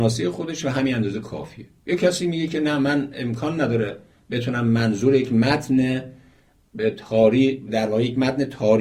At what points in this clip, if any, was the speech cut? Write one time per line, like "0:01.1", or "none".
0:07.7